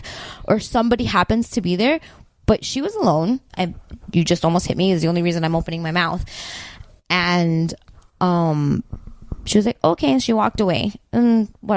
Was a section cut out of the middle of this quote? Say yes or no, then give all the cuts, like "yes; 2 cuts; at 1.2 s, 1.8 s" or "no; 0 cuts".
yes; 1 cut; at 3.5 s